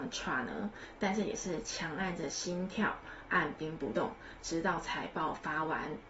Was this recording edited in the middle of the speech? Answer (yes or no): no